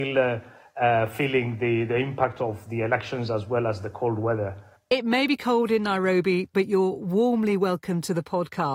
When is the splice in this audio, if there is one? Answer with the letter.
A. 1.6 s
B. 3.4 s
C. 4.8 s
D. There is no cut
C